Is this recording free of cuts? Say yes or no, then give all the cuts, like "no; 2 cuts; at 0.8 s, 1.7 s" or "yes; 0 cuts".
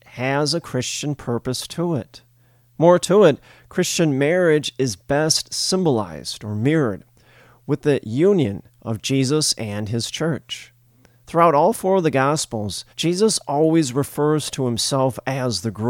no; 1 cut; at 12.9 s